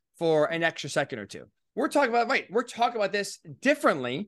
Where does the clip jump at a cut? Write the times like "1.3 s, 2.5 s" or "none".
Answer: 1.7 s